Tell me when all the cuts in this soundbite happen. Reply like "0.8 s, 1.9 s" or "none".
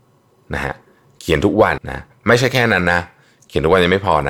1.8 s